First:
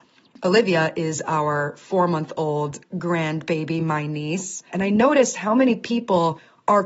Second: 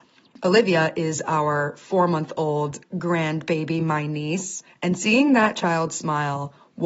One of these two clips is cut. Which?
first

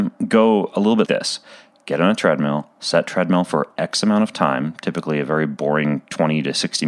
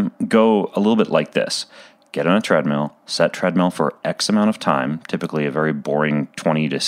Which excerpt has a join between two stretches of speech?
first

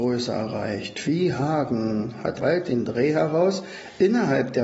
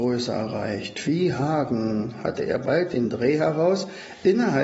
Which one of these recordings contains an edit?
first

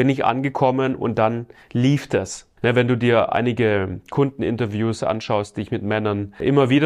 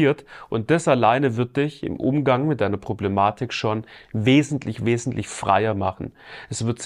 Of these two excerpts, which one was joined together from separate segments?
first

